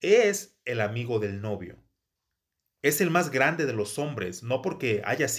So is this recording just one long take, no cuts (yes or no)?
yes